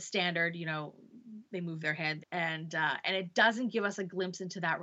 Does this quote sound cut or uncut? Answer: cut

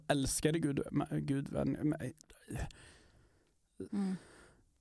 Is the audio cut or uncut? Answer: cut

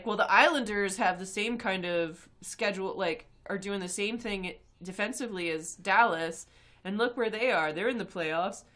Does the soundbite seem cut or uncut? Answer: uncut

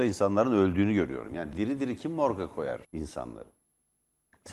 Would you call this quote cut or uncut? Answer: cut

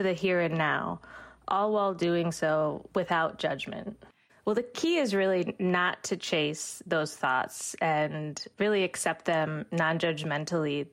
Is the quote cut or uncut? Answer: cut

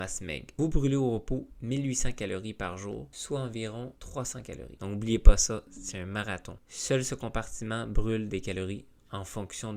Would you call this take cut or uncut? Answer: cut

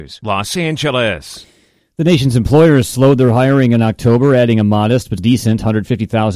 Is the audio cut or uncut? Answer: cut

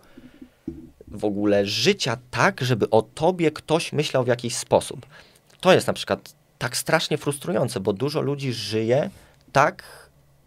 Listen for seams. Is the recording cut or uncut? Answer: uncut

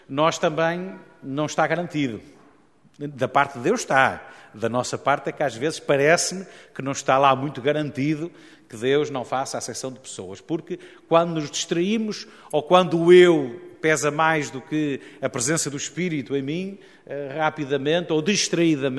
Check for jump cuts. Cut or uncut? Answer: uncut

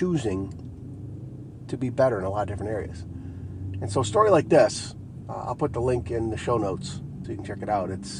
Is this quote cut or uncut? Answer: cut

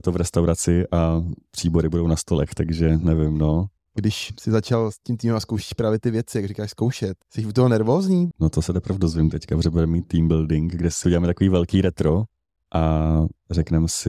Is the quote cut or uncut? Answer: cut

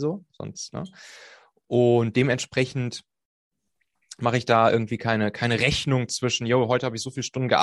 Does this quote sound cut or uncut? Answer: uncut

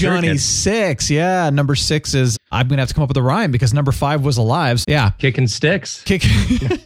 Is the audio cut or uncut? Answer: cut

